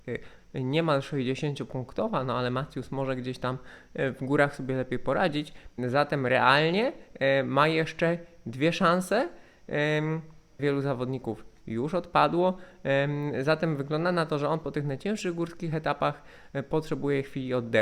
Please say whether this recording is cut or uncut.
cut